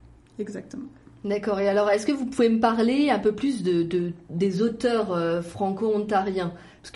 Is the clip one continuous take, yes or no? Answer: yes